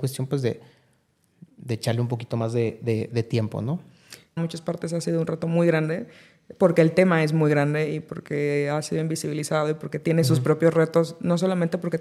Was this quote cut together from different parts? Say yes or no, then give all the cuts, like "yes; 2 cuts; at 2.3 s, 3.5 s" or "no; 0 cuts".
yes; 1 cut; at 4.4 s